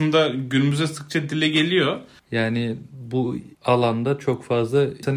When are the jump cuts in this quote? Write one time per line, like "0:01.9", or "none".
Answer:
0:02.2
0:03.5